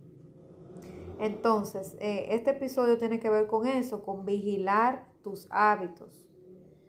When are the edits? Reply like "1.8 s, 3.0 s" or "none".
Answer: none

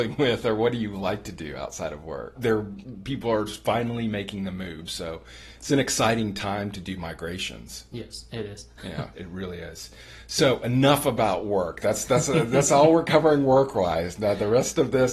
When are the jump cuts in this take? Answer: 2.4 s, 9.1 s

